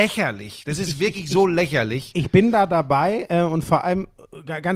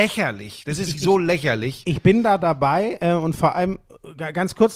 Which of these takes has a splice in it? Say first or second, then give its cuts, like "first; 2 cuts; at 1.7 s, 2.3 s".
second; 1 cut; at 0.9 s